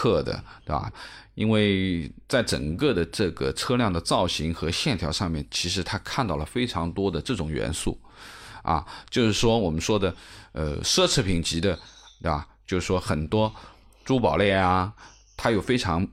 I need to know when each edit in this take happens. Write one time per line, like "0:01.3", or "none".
0:00.9